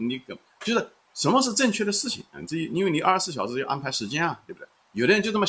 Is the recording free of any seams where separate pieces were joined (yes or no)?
yes